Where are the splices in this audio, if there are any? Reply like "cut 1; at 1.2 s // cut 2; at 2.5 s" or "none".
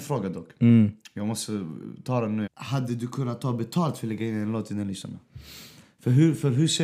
cut 1; at 2.5 s